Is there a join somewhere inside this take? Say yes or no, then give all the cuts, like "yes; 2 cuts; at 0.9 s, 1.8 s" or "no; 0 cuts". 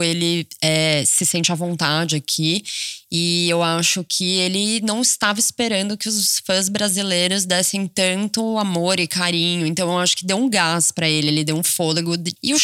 no; 0 cuts